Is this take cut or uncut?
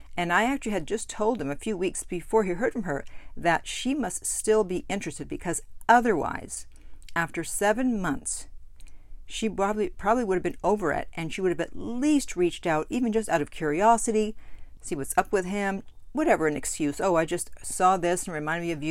cut